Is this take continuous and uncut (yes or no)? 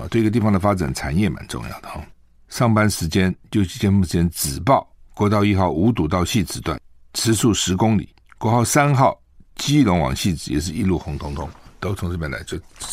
yes